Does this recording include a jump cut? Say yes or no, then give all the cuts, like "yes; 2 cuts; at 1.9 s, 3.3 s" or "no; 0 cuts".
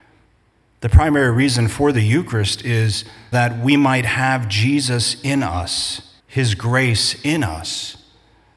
yes; 2 cuts; at 3.3 s, 6.2 s